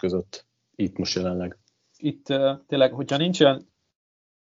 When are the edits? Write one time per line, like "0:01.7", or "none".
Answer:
0:02.0